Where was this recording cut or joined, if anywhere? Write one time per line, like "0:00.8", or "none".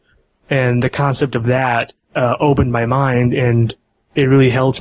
0:02.0